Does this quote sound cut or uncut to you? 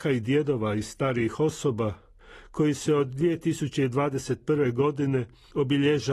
uncut